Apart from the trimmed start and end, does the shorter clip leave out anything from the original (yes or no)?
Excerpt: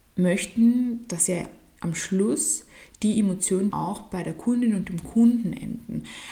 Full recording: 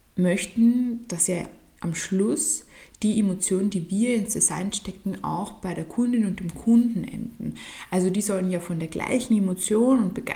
yes